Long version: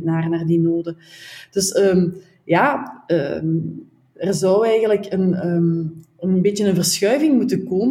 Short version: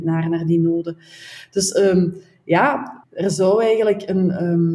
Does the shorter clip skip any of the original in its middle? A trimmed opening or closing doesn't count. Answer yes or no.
yes